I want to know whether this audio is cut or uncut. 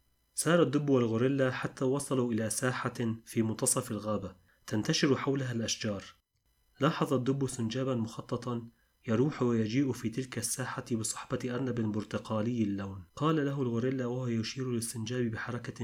cut